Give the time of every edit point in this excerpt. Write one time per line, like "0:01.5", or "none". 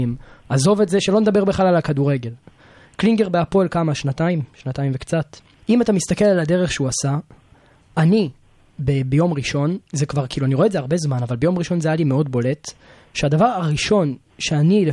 0:05.6

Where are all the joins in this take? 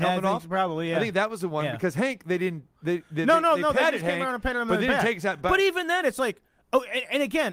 none

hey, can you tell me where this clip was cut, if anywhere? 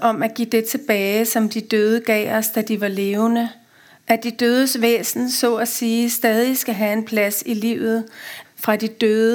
0:08.4

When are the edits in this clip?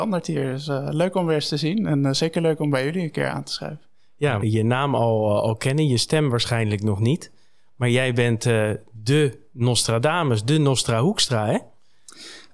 0:04.4

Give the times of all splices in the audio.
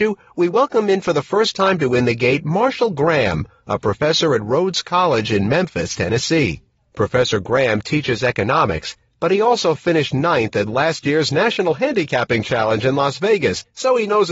none

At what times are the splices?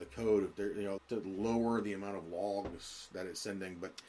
0:01.0

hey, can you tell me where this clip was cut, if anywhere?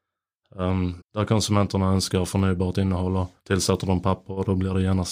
0:01.0
0:03.4

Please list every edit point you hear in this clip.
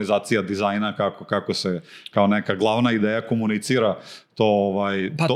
none

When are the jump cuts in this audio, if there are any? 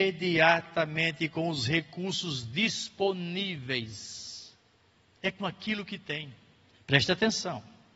0:05.1
0:06.7

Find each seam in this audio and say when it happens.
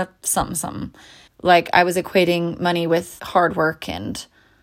0:01.3
0:03.2

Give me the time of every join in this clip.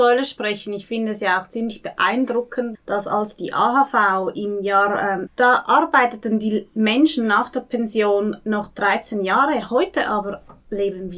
0:02.7
0:05.3

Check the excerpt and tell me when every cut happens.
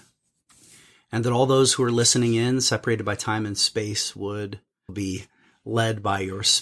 0:04.9

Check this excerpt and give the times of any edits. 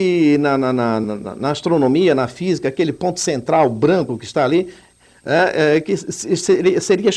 0:01.0

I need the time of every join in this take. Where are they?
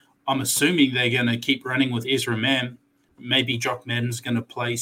0:03.1

